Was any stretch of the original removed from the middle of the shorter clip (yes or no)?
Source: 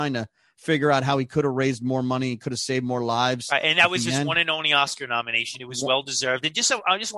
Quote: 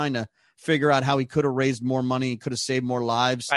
no